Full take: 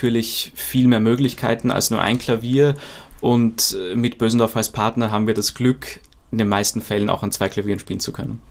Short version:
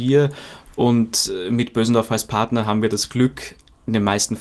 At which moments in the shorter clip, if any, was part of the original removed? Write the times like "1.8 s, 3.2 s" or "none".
none